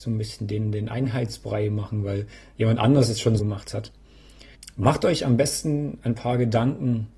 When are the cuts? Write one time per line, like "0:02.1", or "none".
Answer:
0:03.4